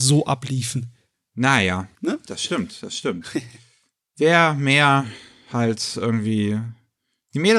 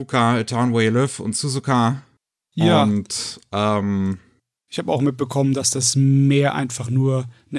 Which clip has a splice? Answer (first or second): first